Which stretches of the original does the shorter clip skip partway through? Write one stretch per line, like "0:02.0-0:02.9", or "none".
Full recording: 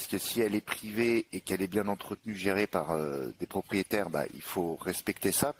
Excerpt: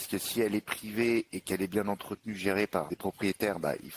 0:02.9-0:03.4